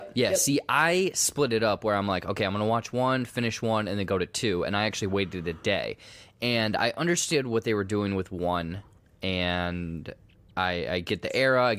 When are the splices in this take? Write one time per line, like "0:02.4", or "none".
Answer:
none